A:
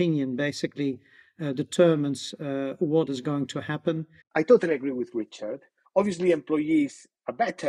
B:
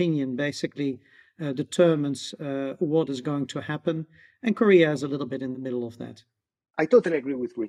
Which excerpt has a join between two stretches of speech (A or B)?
A